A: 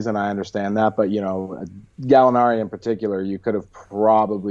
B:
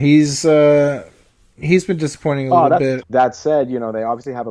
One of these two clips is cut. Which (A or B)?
B